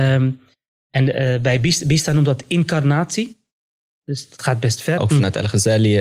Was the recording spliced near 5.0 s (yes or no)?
yes